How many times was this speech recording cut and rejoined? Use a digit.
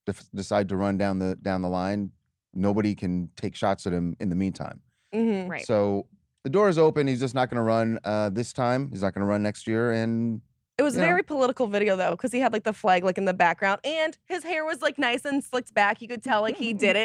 0